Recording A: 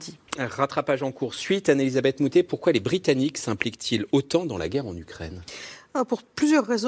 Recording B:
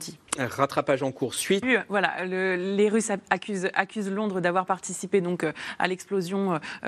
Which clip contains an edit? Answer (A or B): B